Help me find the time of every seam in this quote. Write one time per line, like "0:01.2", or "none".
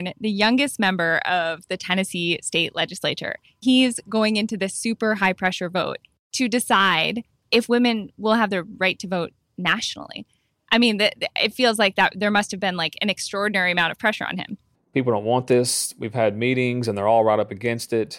0:14.7